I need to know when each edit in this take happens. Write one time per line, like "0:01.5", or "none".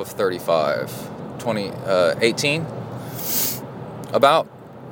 none